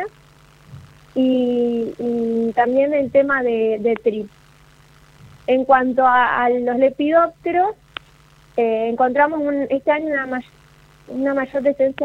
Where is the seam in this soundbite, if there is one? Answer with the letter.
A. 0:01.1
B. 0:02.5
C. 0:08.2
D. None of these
D